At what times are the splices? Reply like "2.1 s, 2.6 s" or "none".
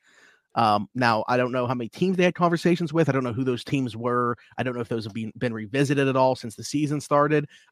none